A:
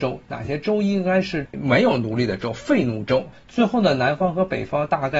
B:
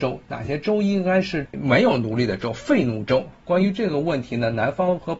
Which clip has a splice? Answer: A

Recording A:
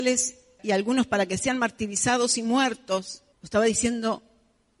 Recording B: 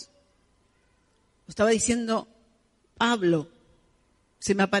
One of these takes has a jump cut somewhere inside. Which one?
A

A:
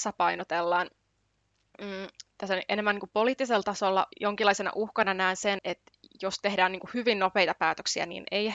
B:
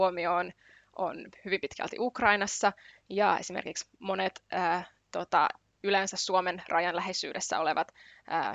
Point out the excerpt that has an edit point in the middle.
A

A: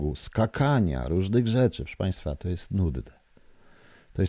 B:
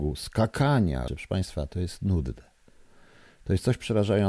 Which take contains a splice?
B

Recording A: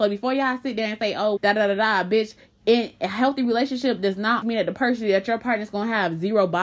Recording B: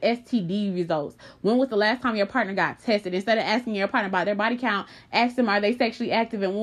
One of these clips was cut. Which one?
A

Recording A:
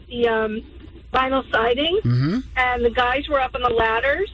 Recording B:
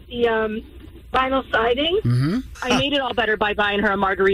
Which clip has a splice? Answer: B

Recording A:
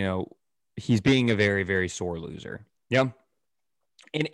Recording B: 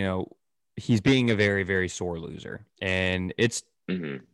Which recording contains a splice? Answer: A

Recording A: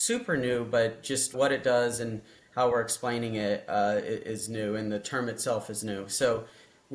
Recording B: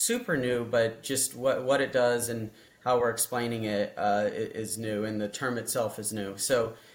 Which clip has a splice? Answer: A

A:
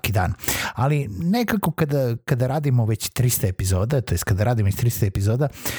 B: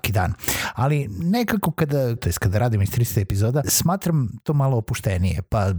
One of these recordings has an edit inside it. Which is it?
B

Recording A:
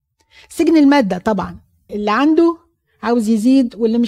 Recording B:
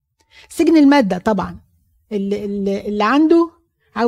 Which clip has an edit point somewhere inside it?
A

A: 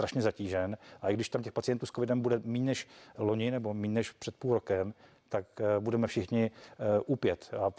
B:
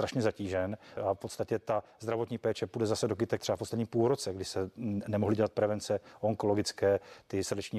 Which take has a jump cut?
B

